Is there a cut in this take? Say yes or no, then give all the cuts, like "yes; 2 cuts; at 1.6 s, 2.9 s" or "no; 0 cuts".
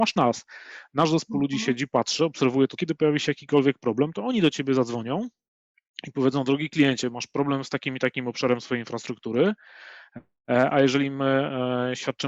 yes; 1 cut; at 2.8 s